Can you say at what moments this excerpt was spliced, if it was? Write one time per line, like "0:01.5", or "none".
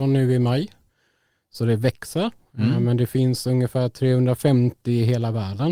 none